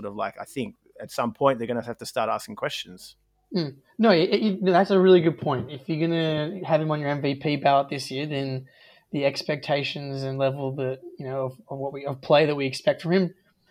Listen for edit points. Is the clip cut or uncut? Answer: uncut